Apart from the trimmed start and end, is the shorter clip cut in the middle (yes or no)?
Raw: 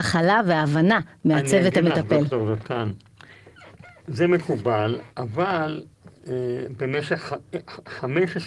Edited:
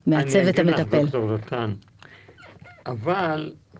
yes